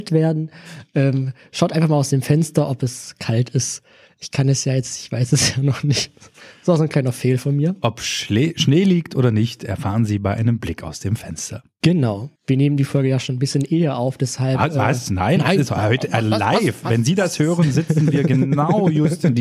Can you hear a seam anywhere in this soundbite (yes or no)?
yes